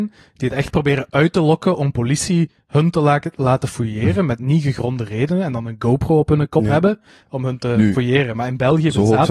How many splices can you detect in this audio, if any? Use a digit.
1